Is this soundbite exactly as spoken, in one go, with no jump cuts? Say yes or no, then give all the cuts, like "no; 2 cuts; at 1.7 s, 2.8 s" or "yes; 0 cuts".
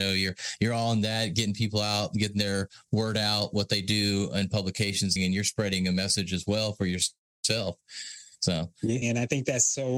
no; 2 cuts; at 5.2 s, 9.0 s